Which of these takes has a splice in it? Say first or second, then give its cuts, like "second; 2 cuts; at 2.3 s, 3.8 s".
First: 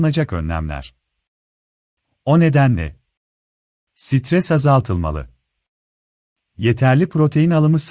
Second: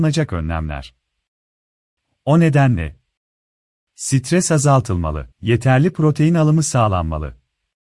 second; 1 cut; at 5.3 s